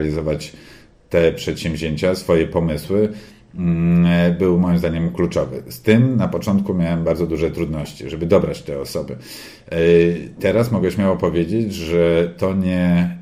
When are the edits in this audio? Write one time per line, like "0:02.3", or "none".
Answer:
none

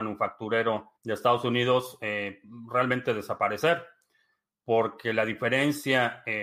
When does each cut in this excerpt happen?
0:00.9

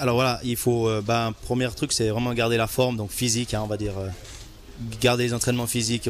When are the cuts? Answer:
none

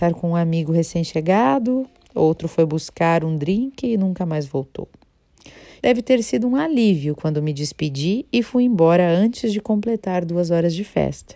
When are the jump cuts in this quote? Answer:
0:05.8

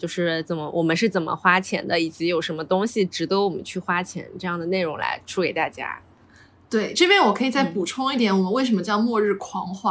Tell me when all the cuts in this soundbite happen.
none

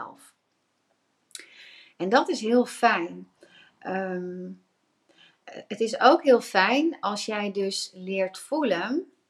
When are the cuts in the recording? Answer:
none

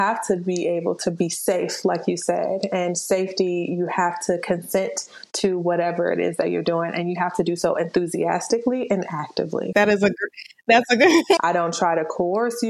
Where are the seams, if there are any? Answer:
0:09.7
0:11.4

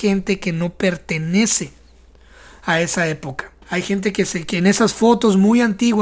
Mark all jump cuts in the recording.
0:03.6

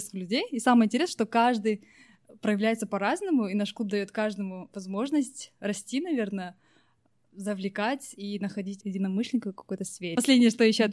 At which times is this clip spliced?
0:08.8

